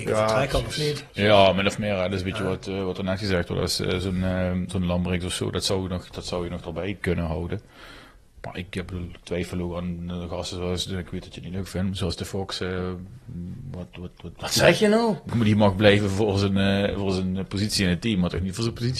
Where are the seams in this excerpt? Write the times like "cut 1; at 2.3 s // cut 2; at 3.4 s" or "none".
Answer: none